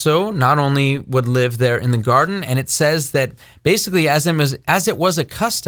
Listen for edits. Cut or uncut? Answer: uncut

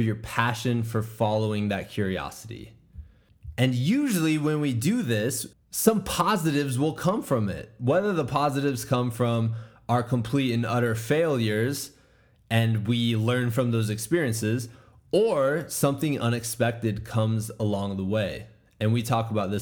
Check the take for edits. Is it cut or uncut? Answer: cut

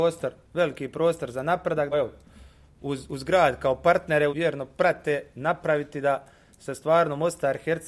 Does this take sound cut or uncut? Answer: cut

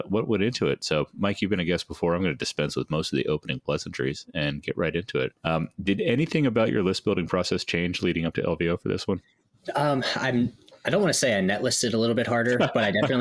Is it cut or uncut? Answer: cut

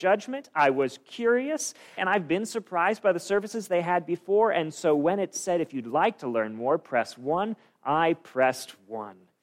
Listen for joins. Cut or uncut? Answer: cut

